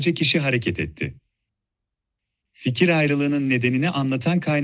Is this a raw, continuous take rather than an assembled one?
no; 1 cut; at 2.4 s

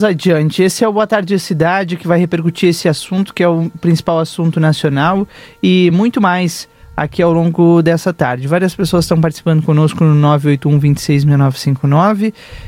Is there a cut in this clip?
no; 0 cuts

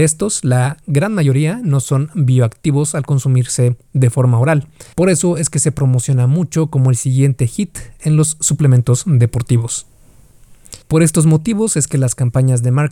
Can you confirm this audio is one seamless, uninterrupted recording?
no; 2 cuts; at 4.9 s, 10.8 s

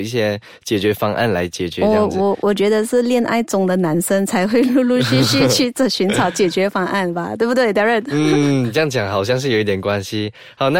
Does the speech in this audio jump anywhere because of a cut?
no; 0 cuts

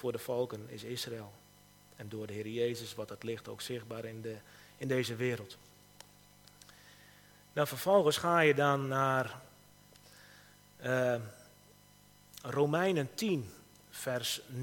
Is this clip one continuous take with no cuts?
yes; 0 cuts

